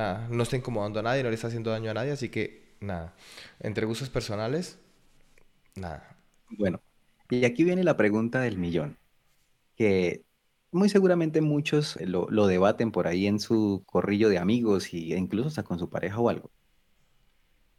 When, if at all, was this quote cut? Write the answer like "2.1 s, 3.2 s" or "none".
12.0 s